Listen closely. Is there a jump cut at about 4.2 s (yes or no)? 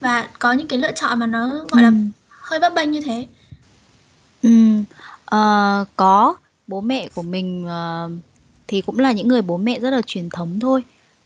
no